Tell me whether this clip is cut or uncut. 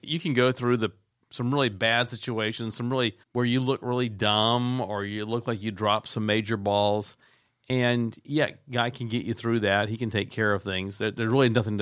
cut